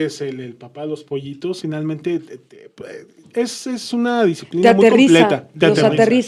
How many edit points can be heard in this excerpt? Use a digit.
1